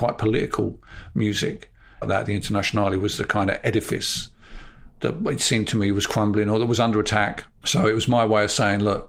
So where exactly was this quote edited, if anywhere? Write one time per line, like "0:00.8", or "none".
0:02.0